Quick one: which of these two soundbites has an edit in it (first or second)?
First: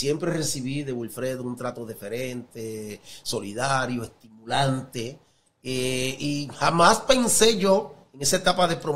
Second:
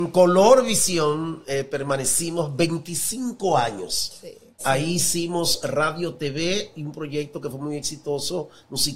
second